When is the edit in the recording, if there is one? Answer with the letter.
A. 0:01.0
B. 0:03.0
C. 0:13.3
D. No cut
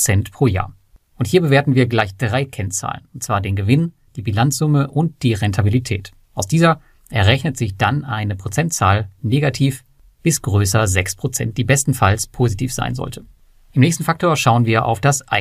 D